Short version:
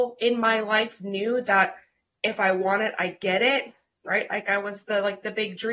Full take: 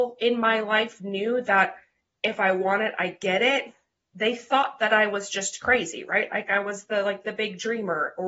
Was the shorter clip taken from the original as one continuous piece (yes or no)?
no